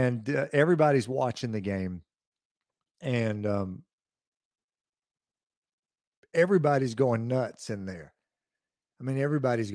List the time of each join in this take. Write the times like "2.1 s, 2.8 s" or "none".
none